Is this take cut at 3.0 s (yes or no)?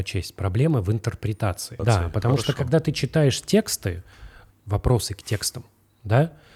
no